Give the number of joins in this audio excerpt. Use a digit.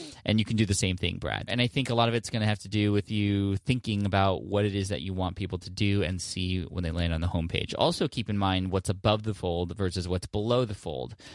1